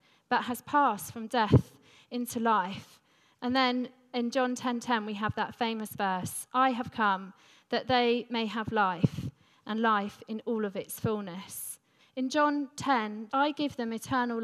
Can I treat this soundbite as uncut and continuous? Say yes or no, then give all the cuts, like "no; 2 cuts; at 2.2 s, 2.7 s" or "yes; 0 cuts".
no; 2 cuts; at 12.0 s, 13.3 s